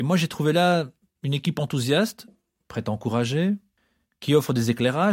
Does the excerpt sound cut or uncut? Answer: uncut